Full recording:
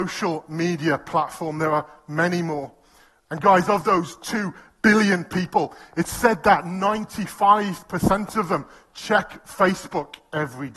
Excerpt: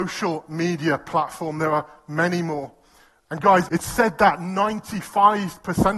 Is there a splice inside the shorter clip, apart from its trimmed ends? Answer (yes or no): yes